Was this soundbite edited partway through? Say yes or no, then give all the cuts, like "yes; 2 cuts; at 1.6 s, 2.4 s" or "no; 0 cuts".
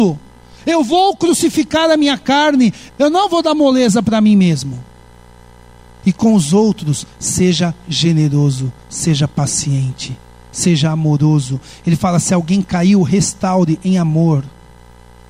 yes; 1 cut; at 2.9 s